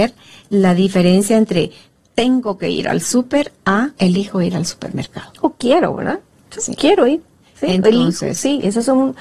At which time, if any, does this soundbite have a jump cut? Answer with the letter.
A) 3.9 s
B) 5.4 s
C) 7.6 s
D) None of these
A